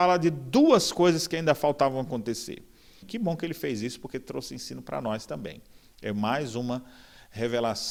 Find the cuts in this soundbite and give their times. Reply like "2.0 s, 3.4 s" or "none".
3.0 s